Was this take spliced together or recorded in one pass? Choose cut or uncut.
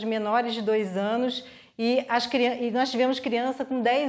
uncut